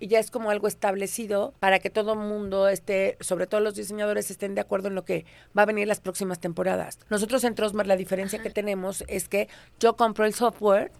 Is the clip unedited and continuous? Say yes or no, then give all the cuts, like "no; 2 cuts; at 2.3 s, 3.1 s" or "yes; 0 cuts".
yes; 0 cuts